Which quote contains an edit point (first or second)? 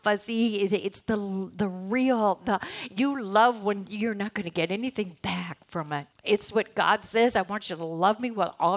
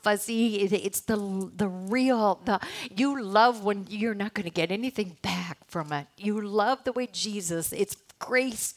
first